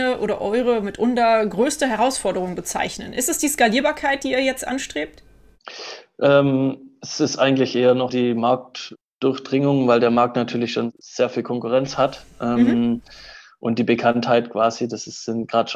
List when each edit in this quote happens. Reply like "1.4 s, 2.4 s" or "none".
8.1 s

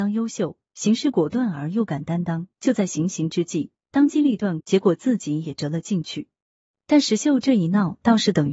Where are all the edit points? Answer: 4.6 s

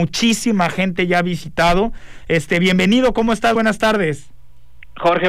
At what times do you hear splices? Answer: none

